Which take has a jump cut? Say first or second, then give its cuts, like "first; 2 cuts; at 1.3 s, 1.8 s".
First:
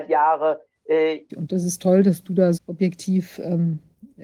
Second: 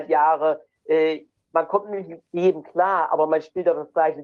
first; 2 cuts; at 1.3 s, 2.6 s